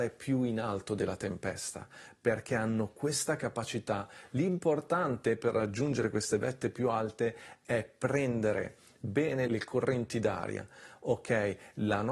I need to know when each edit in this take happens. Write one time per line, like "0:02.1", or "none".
0:09.5